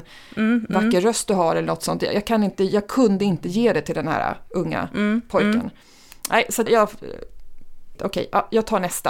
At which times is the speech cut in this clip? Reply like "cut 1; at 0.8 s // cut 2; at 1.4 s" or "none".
cut 1; at 6.7 s // cut 2; at 8.0 s